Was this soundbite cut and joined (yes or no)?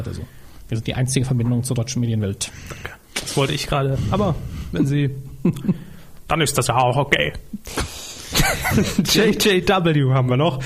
no